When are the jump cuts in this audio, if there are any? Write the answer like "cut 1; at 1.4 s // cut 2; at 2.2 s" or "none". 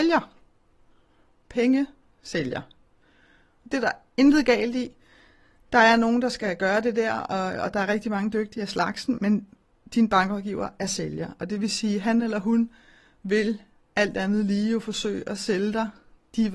cut 1; at 9.2 s